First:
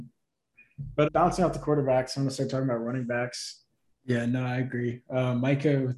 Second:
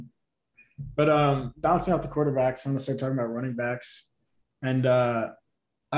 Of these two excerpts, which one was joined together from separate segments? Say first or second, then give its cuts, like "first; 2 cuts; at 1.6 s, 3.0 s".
first; 2 cuts; at 1.0 s, 4.0 s